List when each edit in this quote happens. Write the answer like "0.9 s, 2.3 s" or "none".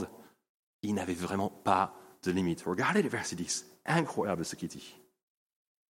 none